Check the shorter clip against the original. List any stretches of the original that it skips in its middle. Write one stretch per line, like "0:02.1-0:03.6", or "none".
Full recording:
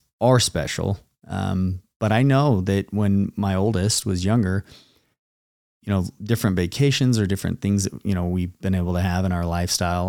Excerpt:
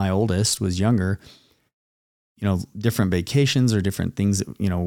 none